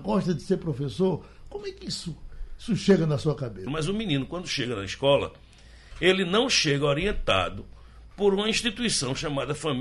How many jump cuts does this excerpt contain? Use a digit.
1